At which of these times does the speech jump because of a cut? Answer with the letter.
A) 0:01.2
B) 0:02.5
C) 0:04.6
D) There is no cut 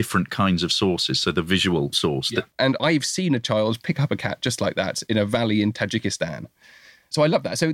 B